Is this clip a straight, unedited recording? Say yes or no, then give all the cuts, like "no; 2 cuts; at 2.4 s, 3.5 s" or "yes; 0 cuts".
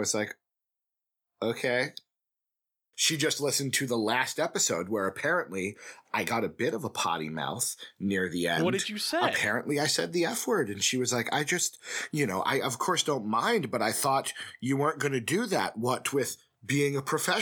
no; 1 cut; at 2.9 s